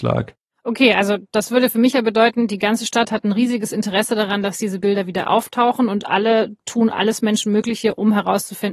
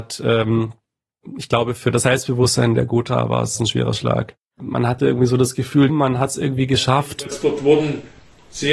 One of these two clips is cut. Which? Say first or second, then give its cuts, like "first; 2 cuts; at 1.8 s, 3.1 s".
second; 2 cuts; at 4.6 s, 5.9 s